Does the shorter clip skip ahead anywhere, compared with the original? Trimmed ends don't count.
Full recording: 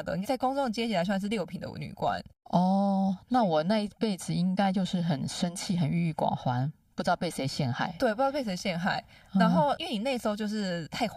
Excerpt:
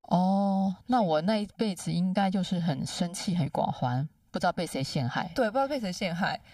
yes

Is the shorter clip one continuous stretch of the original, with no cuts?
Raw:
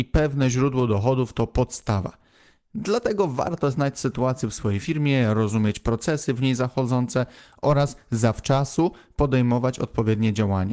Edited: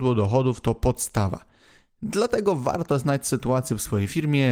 yes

